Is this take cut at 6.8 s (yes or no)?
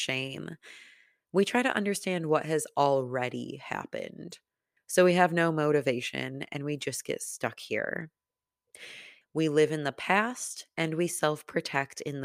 no